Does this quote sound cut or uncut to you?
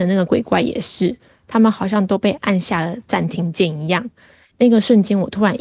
uncut